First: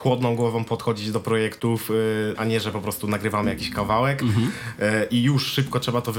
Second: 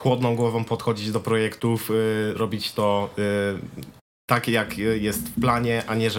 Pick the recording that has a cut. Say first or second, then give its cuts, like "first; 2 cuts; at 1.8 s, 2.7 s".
first; 1 cut; at 2.4 s